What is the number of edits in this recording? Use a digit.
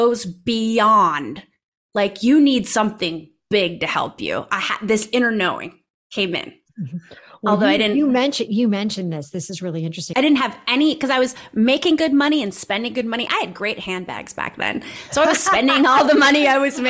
1